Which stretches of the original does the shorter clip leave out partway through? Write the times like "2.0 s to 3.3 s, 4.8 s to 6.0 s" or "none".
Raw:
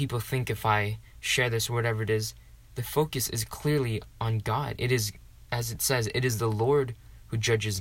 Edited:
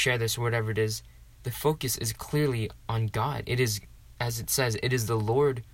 none